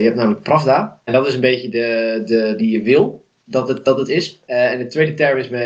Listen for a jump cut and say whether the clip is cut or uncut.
cut